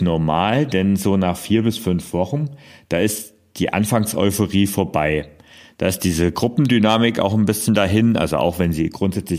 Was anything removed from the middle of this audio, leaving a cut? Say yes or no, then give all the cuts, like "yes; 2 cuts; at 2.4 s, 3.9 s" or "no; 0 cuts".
no; 0 cuts